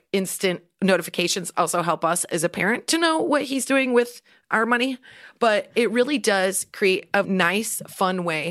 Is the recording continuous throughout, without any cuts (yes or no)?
no